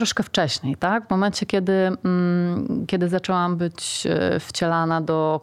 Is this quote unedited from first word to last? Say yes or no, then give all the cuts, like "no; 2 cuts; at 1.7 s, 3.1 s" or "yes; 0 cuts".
yes; 0 cuts